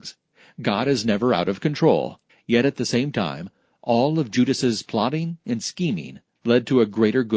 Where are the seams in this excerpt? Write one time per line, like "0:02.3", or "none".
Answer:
0:02.3